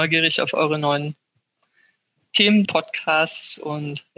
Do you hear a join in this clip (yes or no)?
yes